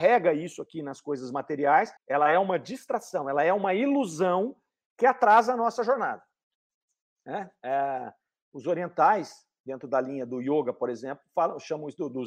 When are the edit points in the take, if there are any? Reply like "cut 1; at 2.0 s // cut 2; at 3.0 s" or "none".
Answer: cut 1; at 2.0 s